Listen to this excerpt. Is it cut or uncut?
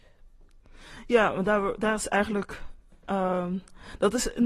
uncut